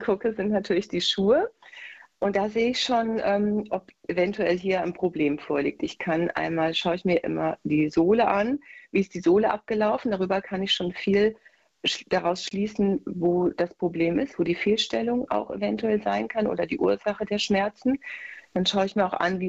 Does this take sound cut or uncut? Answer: uncut